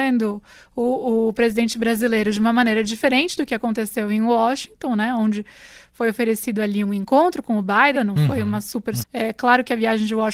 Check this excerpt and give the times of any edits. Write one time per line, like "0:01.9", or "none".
0:08.0
0:09.0